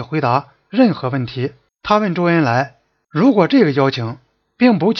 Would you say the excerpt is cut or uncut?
cut